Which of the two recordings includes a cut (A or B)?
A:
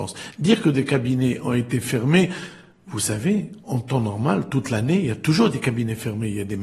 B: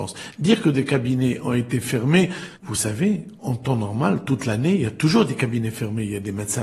B